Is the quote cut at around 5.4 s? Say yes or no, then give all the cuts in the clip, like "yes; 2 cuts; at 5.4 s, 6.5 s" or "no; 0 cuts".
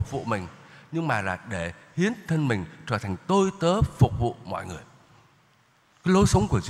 no; 0 cuts